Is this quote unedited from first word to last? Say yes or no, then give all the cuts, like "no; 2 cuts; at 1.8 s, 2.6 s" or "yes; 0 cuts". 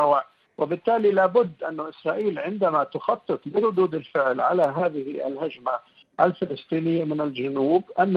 yes; 0 cuts